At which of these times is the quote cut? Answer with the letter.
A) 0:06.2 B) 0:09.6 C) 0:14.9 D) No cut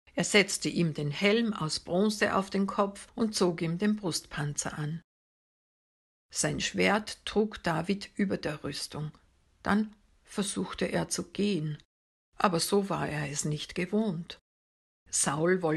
C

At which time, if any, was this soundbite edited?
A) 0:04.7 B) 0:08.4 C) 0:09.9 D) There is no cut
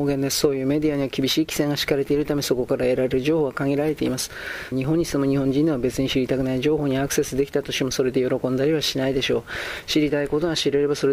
A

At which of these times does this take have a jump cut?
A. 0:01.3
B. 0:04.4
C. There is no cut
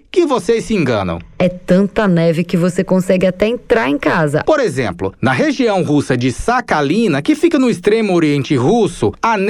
B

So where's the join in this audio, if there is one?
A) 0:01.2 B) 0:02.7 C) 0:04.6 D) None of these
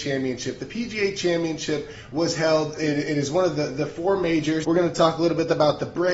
C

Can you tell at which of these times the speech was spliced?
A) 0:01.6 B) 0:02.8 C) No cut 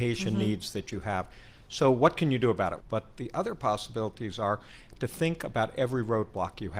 B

